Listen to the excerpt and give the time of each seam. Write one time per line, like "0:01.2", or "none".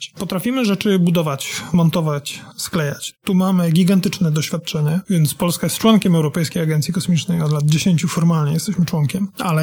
0:02.5
0:05.0